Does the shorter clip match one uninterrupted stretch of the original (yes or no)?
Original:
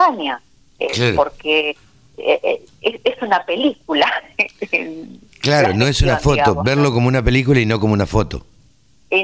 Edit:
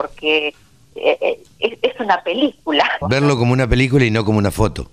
no